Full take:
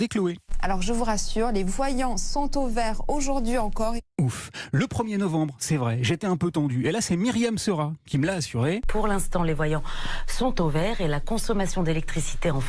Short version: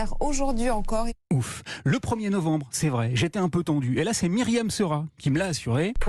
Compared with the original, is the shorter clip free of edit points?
yes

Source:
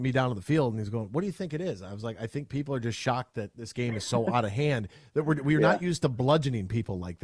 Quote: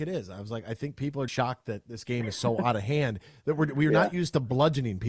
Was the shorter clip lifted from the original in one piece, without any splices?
no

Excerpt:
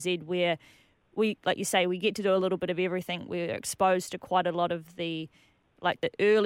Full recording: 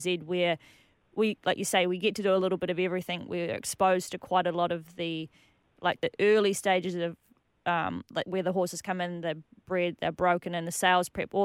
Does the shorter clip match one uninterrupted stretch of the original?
yes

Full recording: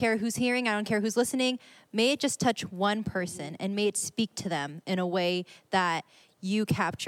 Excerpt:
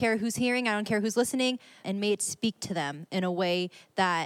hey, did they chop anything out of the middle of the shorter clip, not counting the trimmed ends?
yes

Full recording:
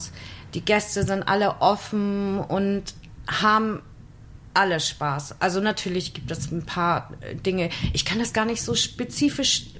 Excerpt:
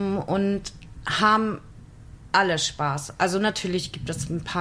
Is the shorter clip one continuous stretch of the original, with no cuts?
yes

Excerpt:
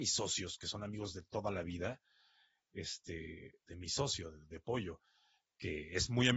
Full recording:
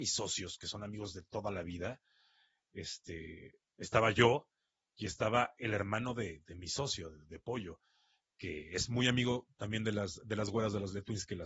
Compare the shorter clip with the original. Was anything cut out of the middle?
yes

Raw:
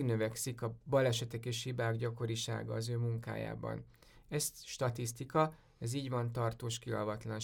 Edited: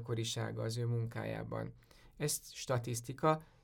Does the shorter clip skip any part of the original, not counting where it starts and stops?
no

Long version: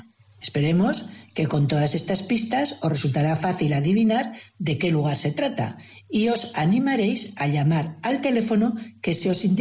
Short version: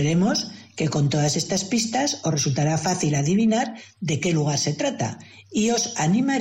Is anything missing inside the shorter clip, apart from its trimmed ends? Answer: no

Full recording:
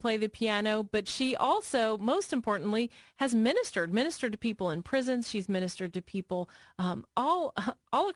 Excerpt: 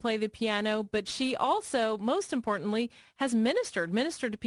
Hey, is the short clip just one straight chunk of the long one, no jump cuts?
yes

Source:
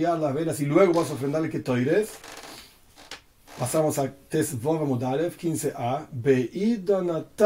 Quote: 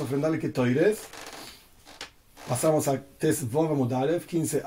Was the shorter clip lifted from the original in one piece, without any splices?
yes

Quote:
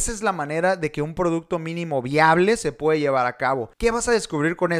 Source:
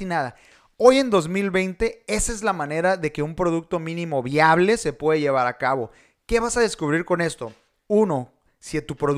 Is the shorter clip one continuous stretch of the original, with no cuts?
no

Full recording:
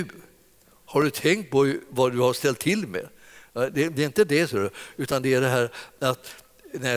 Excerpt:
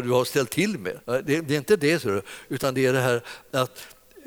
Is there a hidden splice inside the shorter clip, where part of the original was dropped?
yes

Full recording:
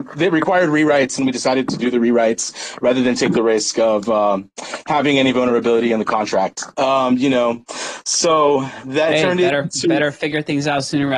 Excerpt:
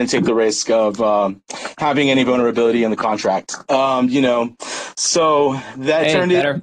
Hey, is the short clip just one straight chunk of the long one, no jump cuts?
yes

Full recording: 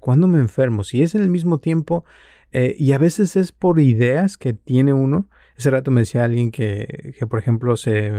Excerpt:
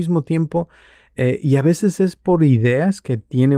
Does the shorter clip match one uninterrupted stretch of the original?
yes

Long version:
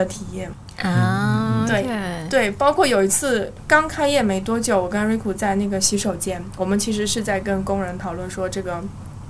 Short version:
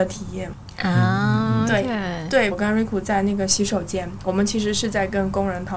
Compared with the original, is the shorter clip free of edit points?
no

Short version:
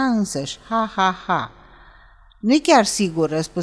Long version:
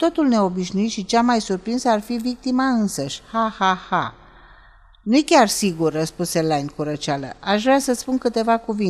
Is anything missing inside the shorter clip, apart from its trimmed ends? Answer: no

